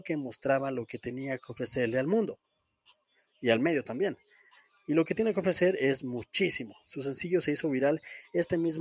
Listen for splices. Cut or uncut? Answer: uncut